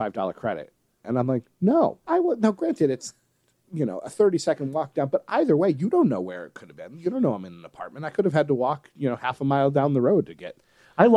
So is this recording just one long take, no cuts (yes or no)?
no